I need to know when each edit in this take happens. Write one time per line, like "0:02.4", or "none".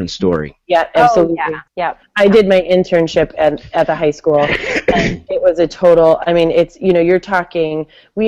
0:01.7